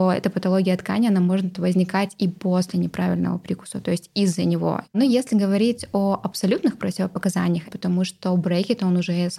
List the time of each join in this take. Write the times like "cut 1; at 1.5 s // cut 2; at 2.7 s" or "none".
cut 1; at 4.8 s // cut 2; at 7.6 s